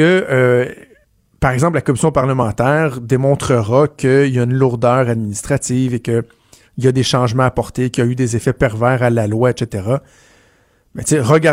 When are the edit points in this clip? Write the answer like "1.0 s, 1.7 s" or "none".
none

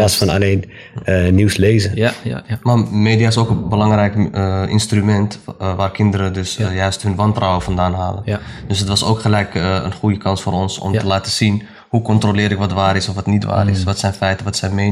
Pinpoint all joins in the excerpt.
none

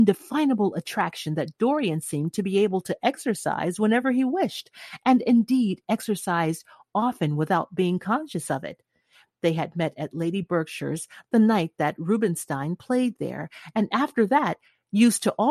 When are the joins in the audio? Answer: none

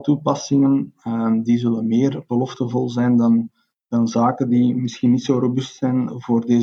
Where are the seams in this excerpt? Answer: none

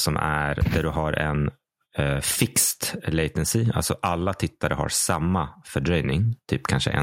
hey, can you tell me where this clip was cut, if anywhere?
none

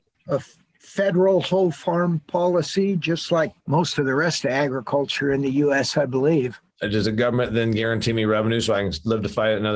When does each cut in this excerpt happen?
3.6 s, 6.7 s

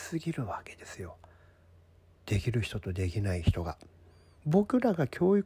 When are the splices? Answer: 4.4 s

